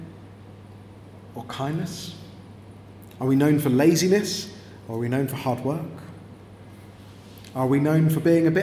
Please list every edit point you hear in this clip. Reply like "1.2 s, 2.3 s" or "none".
none